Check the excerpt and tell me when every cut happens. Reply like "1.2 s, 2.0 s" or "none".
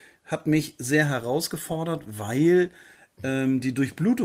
none